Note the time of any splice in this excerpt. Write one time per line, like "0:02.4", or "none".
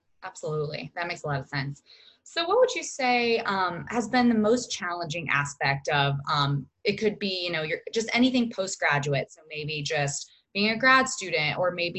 none